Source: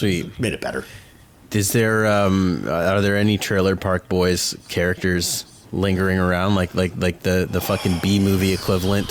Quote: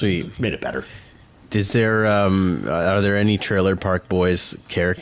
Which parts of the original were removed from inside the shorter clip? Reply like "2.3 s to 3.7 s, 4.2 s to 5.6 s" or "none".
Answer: none